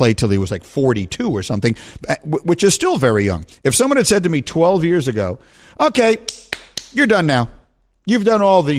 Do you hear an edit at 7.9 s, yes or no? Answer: no